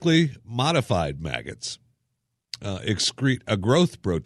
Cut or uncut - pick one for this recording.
uncut